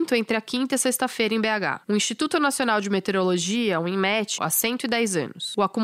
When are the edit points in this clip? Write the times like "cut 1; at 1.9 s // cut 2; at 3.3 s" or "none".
cut 1; at 4.4 s